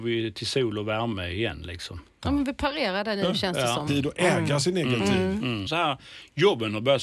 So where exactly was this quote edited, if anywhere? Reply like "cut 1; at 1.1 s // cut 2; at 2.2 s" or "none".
cut 1; at 3.9 s // cut 2; at 5.7 s